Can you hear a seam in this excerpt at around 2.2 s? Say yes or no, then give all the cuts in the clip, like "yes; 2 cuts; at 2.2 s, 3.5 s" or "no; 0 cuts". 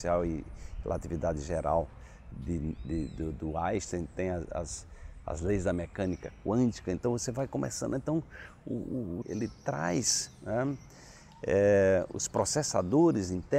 no; 1 cut; at 9.2 s